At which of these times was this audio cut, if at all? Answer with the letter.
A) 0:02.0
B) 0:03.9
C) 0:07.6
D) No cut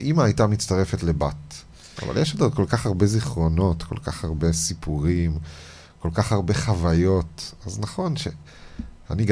A